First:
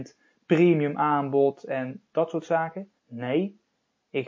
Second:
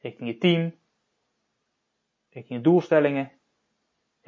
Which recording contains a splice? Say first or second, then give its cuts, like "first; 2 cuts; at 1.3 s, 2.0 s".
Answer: first; 1 cut; at 3.0 s